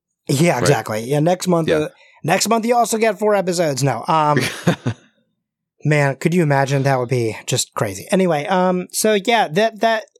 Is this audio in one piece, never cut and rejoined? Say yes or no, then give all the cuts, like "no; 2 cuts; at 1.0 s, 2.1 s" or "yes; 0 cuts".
yes; 0 cuts